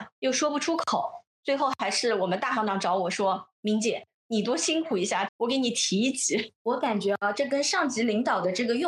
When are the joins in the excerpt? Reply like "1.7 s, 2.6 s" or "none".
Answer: 5.3 s, 6.6 s